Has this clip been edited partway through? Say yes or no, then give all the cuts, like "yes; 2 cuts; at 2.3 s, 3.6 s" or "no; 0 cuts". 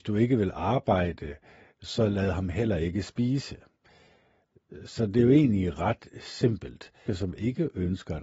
yes; 1 cut; at 7.1 s